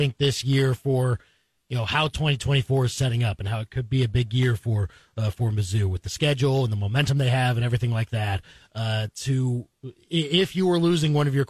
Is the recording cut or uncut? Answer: uncut